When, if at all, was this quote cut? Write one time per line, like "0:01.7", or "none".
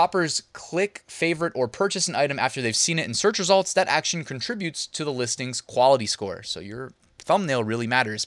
none

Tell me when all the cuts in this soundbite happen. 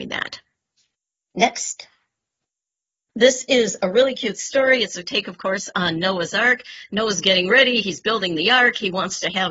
0:03.1

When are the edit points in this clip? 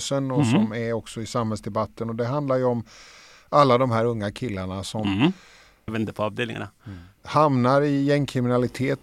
0:05.9
0:07.2

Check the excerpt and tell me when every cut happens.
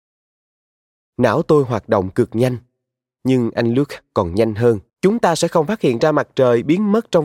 0:01.1
0:04.9

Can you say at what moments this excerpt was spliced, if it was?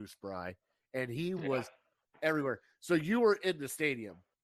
none

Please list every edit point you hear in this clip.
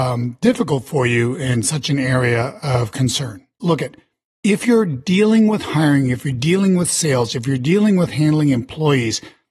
0:03.6

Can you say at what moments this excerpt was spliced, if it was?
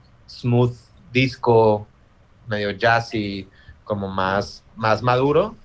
none

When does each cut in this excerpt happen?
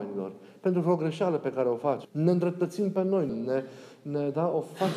0:02.0
0:03.3

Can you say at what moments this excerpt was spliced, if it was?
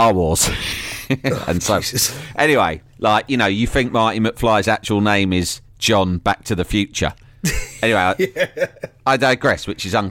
0:02.9

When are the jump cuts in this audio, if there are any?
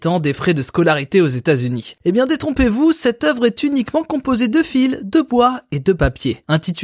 0:02.0

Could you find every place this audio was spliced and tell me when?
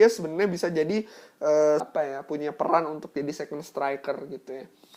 0:01.8

